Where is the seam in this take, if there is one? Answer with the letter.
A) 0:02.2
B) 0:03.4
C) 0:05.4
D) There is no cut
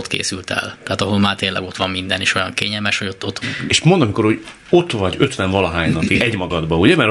B